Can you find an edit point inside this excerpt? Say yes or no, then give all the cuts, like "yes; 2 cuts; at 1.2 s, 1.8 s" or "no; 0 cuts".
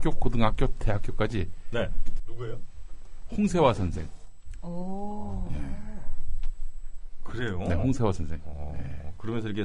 yes; 1 cut; at 2.2 s